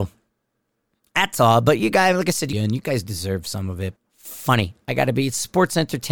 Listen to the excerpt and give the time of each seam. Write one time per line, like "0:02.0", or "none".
0:02.5
0:04.0